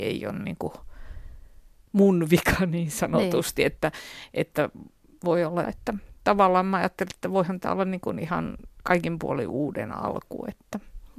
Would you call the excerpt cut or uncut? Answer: cut